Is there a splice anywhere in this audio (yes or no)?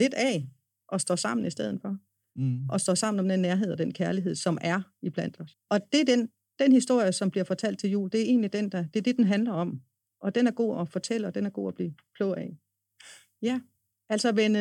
yes